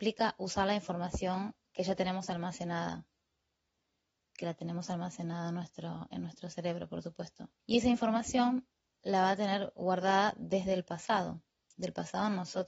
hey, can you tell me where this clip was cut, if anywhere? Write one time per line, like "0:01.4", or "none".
0:07.6